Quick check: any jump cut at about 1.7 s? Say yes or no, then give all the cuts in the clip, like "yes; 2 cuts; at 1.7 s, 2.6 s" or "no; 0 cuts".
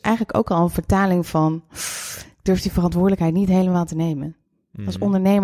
no; 0 cuts